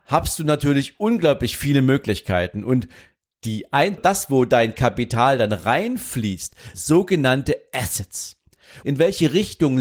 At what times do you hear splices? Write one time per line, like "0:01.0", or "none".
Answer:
0:04.0
0:06.7
0:08.8

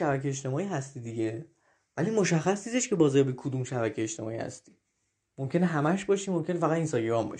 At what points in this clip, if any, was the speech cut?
none

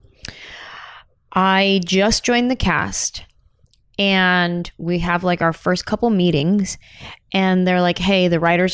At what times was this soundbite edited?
none

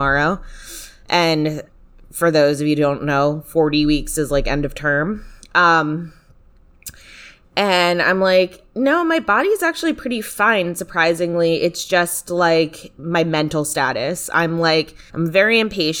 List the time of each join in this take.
0:15.1

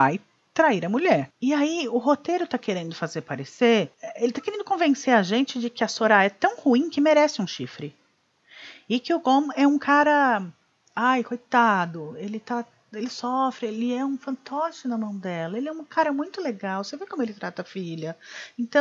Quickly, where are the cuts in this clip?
none

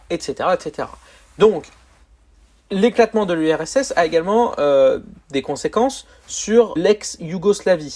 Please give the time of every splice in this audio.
0:06.8

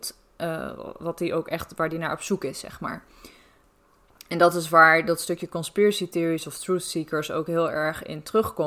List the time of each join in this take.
0:01.0

